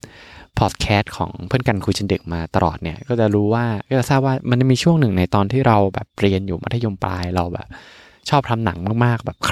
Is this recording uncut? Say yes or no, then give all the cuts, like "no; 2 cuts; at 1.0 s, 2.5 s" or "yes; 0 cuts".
yes; 0 cuts